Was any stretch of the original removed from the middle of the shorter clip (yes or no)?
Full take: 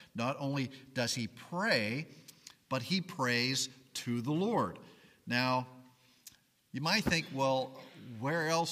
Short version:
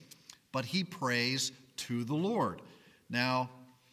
no